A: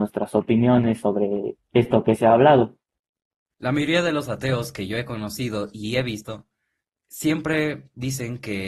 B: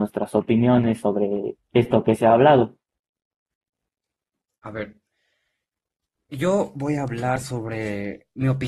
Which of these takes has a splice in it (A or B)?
A